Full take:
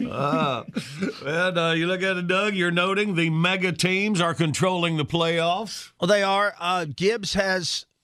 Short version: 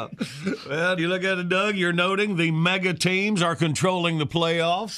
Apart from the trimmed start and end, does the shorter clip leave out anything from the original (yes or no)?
yes